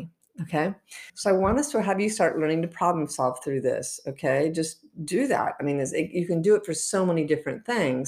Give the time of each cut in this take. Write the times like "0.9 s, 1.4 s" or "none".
1.1 s